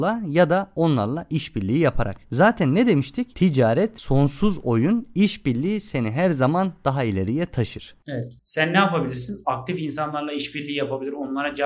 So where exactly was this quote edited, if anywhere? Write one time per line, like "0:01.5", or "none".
0:08.4